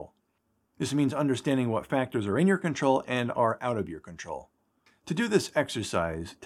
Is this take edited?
yes; 1 cut; at 4.9 s

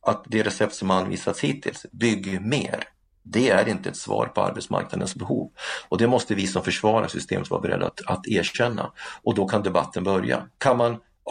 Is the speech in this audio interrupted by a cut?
no; 0 cuts

